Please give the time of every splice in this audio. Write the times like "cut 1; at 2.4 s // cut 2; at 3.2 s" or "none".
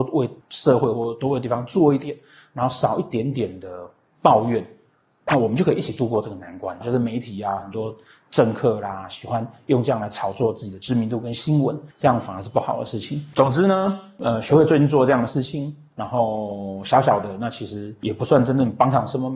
cut 1; at 6.8 s // cut 2; at 11.9 s // cut 3; at 13.3 s